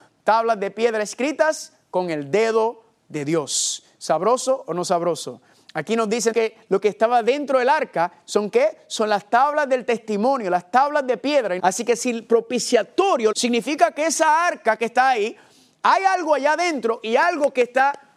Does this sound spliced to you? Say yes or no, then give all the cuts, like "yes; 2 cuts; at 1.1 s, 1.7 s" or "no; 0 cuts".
yes; 3 cuts; at 6.3 s, 11.6 s, 13.3 s